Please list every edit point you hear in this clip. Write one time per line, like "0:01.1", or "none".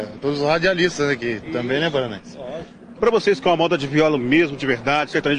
0:03.0